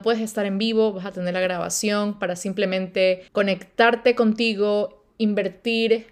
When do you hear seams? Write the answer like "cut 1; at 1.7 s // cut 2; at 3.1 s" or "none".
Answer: cut 1; at 3.3 s